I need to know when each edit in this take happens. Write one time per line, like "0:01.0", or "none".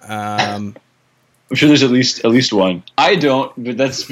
0:02.8

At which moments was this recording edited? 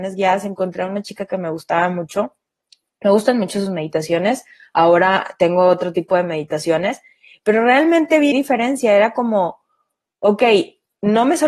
0:08.3

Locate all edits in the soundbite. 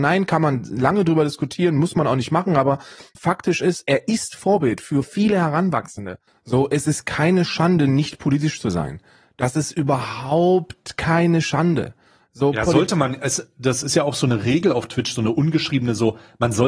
0:03.1
0:05.0
0:06.3

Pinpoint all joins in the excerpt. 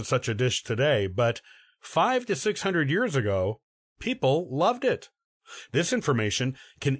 0:05.7

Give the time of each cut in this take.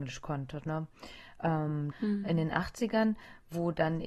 0:01.9

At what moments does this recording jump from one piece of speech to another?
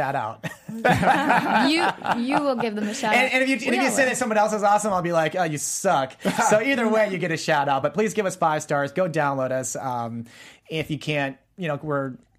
none

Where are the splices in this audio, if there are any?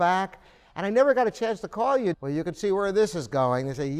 0:02.1

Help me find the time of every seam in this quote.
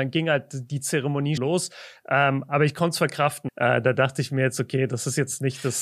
0:01.4
0:03.5

